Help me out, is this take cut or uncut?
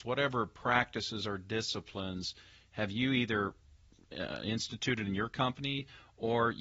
uncut